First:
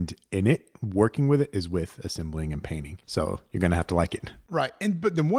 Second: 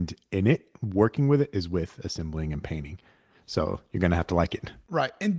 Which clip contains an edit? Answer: first; 1 cut; at 3.0 s

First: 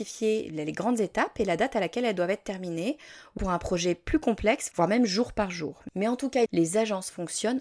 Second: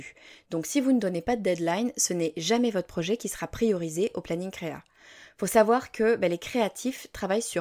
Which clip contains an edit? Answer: first; 3 cuts; at 3.4 s, 4.7 s, 6.5 s

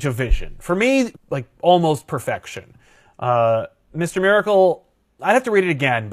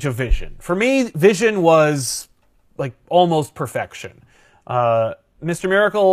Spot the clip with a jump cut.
first; 1 cut; at 1.1 s

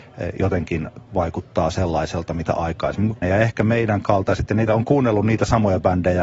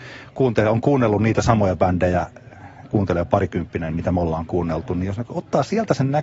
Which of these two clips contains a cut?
first; 2 cuts; at 3.2 s, 4.7 s

